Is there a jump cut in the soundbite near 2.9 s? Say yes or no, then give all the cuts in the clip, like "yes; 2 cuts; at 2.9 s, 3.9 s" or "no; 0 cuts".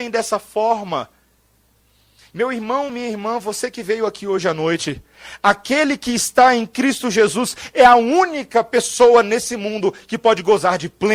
no; 0 cuts